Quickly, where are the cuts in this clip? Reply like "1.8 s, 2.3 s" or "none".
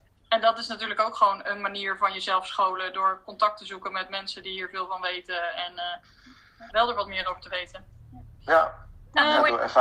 6.7 s